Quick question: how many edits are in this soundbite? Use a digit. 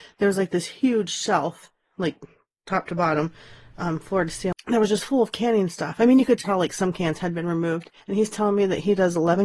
1